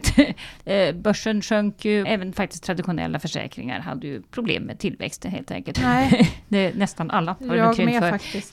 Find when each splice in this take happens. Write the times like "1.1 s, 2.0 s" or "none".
2.0 s, 5.7 s